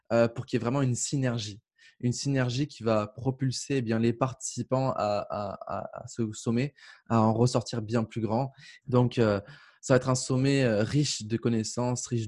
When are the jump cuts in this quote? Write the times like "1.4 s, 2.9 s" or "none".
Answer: 8.8 s